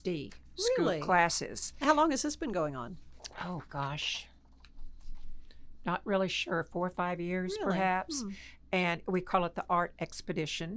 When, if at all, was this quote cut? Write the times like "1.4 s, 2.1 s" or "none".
none